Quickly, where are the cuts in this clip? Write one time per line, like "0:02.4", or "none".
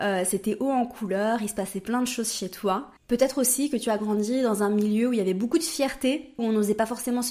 0:03.0
0:06.4